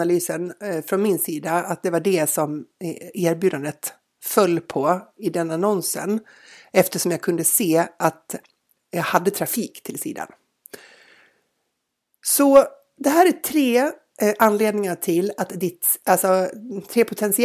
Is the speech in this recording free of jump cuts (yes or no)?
yes